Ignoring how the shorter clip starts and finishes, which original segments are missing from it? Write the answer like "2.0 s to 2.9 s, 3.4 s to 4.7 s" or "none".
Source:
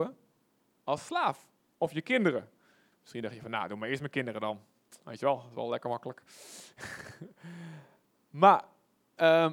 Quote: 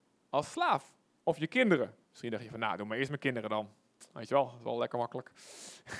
2.6 s to 3.0 s